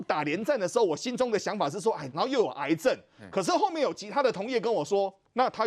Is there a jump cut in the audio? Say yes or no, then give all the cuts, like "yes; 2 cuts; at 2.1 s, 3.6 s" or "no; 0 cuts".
yes; 1 cut; at 2.1 s